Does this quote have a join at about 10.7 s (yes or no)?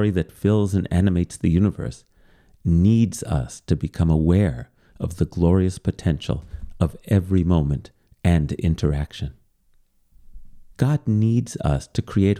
yes